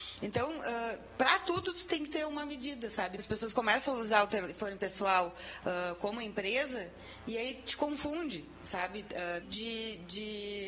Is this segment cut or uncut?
cut